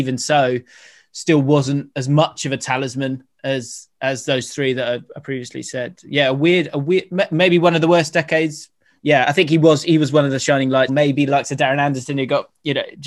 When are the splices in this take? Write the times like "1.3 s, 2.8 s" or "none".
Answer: 9.0 s, 10.9 s